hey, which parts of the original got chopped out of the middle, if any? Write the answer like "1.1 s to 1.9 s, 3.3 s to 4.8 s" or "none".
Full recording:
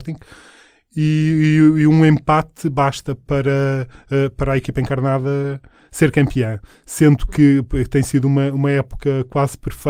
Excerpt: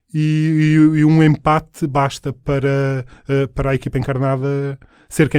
none